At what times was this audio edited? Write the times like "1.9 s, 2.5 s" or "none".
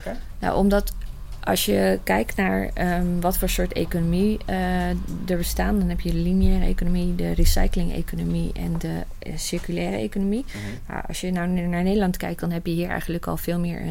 none